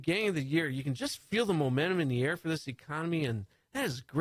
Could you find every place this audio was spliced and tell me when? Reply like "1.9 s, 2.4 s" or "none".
none